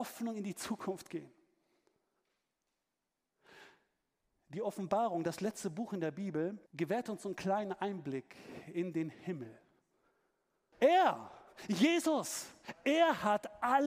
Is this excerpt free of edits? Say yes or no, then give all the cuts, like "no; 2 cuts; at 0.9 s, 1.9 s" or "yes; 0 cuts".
no; 2 cuts; at 6.7 s, 10.7 s